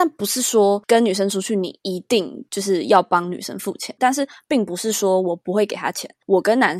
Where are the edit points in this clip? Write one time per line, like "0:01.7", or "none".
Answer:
0:04.0